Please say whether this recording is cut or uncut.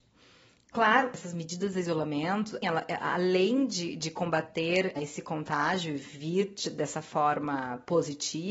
cut